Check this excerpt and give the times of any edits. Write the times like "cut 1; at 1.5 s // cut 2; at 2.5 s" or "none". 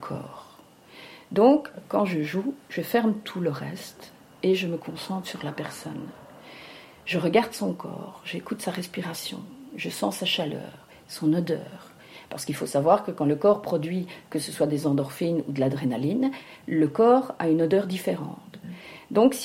none